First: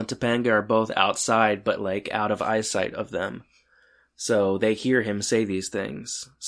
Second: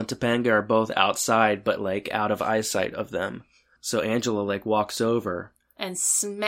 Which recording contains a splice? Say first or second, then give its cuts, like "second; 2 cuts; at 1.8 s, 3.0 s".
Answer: second; 1 cut; at 3.8 s